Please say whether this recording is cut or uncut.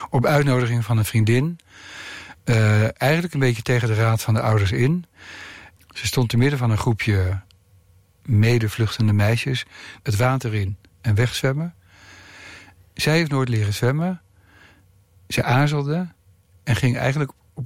cut